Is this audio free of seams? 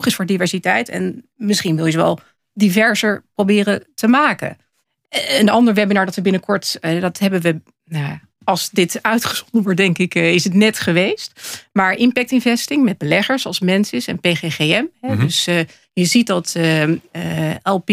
yes; 0 cuts

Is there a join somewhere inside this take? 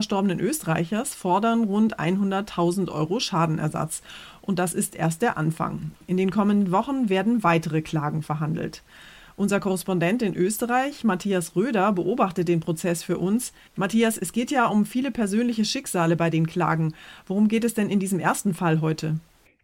no; 0 cuts

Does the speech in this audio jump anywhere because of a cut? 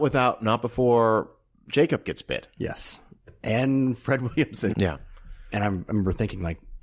yes; 1 cut; at 4.7 s

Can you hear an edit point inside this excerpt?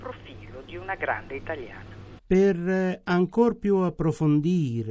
no; 0 cuts

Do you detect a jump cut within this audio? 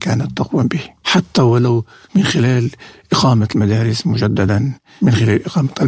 no; 0 cuts

